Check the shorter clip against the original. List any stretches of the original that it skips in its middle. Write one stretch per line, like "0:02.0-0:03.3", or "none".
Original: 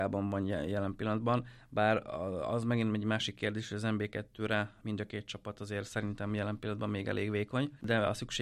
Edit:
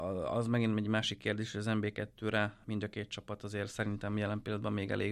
none